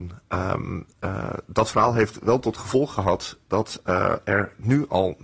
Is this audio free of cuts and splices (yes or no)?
yes